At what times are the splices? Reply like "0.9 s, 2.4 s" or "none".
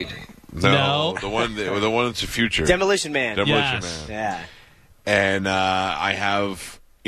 none